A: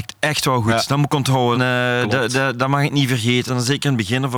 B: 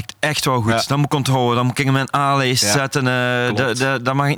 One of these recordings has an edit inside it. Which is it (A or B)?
A